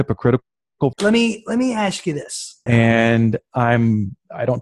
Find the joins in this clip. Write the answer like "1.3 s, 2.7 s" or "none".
0.9 s, 2.7 s

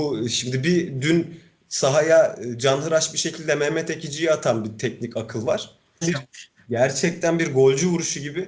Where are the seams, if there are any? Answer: 6.0 s

